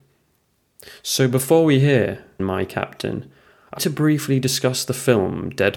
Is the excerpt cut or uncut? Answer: cut